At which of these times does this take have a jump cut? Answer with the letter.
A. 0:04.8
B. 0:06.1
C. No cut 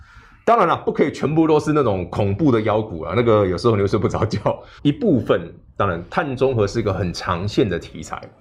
A